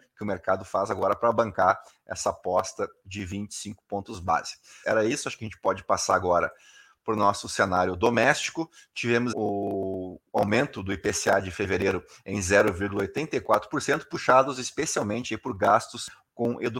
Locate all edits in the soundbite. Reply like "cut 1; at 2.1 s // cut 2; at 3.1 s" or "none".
cut 1; at 4.8 s // cut 2; at 9.3 s

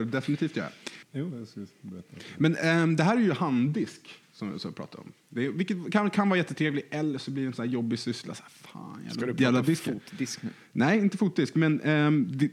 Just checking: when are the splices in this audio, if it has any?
cut 1; at 1.0 s

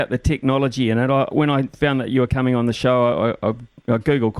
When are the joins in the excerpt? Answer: cut 1; at 1.3 s

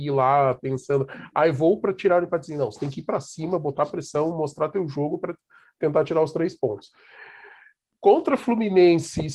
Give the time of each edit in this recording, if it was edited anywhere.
none

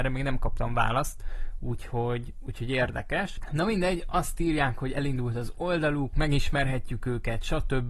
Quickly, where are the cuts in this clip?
cut 1; at 6.1 s

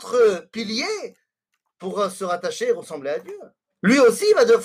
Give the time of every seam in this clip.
cut 1; at 3.7 s

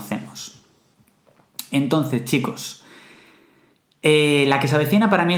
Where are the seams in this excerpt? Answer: none

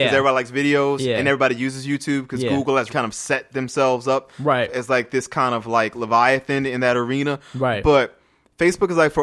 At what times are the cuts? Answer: cut 1; at 2.9 s

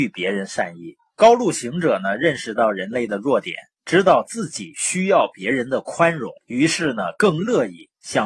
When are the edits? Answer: cut 1; at 1.2 s // cut 2; at 6.4 s

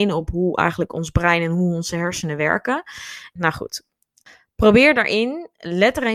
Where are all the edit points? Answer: cut 1; at 3.4 s

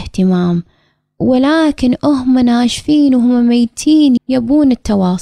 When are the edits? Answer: cut 1; at 4.2 s

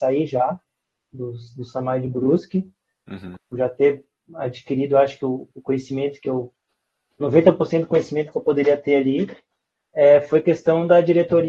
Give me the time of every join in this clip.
cut 1; at 3.4 s

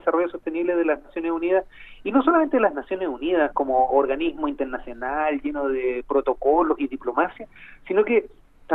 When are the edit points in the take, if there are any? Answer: none

